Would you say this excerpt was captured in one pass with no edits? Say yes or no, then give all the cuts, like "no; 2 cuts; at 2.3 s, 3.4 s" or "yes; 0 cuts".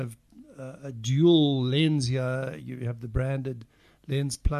yes; 0 cuts